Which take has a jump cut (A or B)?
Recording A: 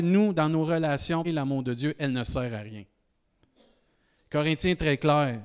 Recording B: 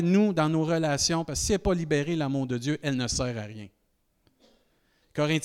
A